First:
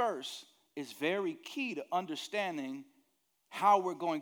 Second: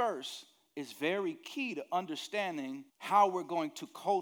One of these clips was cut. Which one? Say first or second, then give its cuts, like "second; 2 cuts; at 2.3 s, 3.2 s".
second; 1 cut; at 2.9 s